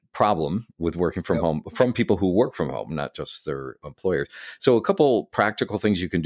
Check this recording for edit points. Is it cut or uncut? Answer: uncut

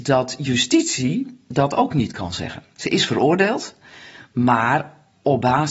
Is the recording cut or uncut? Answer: uncut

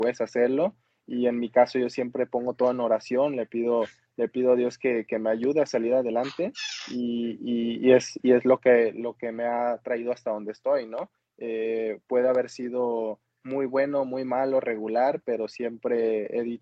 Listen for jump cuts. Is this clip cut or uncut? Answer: uncut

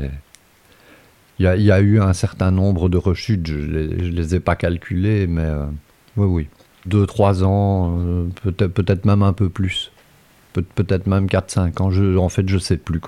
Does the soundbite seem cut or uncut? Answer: uncut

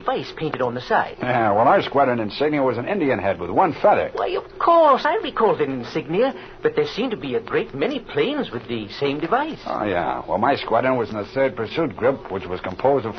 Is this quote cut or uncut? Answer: uncut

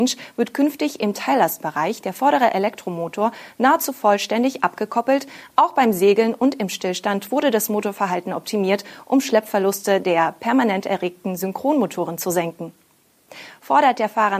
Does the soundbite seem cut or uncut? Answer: uncut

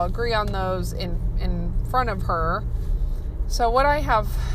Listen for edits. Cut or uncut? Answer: cut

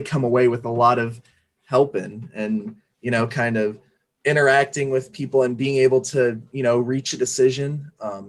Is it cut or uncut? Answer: uncut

